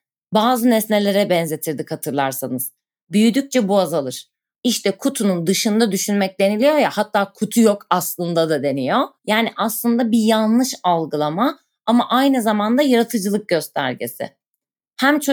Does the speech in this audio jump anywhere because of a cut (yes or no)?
yes